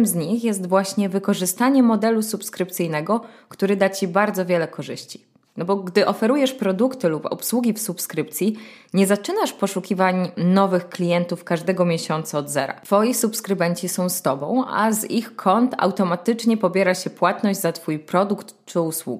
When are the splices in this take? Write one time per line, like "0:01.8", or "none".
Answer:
0:05.5